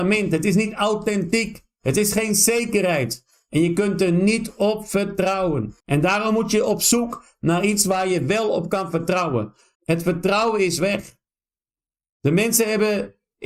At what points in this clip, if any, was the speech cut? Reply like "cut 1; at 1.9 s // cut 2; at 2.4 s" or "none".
cut 1; at 5.8 s // cut 2; at 9.7 s